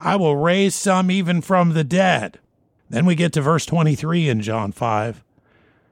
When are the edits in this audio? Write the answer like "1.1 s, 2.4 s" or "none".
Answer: 2.8 s

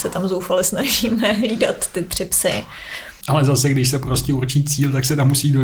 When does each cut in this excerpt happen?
3.2 s

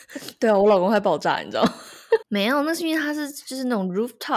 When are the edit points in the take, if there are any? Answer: 2.2 s

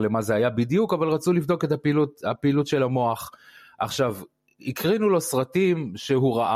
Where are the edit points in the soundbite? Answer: none

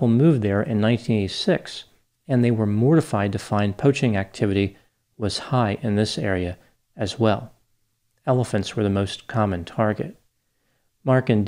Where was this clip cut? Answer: none

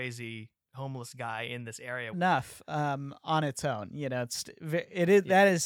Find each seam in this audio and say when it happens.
2.1 s

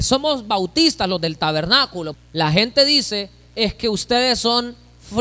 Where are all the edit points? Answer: 2.1 s

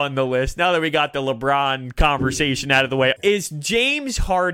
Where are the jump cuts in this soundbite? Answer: 3.2 s

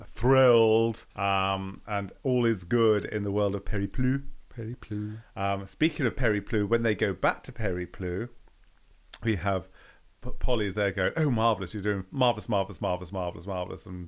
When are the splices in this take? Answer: 1.1 s

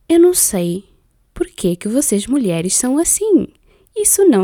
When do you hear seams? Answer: none

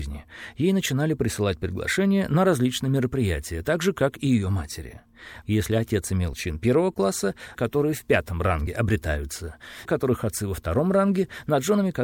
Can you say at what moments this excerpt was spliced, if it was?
5.4 s, 7.5 s, 9.9 s

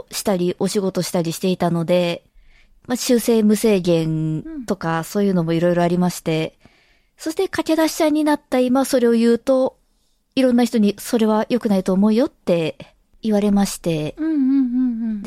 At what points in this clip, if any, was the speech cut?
none

